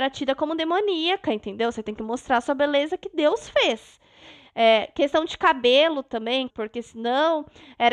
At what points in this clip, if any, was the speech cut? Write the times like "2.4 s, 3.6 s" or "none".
6.5 s